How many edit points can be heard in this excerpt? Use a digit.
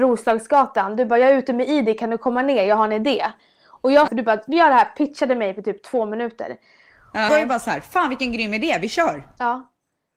2